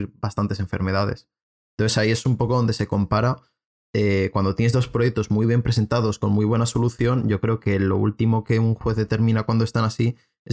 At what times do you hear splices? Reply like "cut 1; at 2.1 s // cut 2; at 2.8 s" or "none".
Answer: none